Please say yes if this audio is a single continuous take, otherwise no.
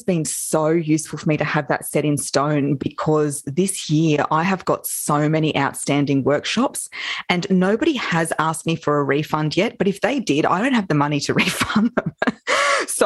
yes